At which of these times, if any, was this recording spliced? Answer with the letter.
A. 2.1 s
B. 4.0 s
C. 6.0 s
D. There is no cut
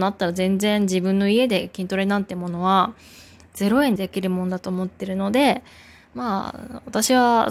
B